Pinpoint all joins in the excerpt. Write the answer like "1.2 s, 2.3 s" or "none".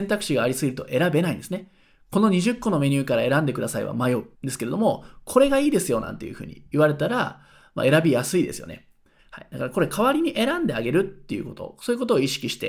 4.3 s, 9.2 s